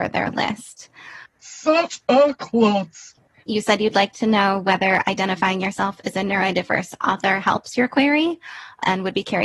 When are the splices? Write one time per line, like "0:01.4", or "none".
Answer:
0:01.3
0:03.4